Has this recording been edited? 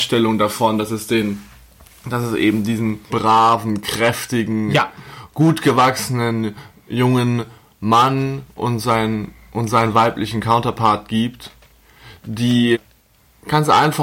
yes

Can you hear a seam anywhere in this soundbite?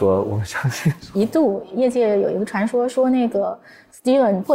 yes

